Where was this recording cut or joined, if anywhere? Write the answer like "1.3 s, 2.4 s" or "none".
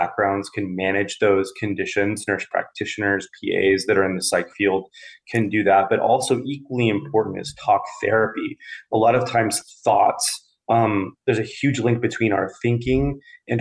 none